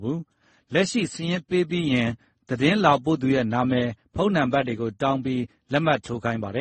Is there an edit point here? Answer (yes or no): no